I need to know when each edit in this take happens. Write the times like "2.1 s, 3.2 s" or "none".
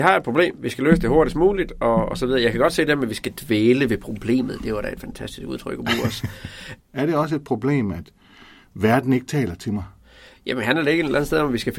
6.8 s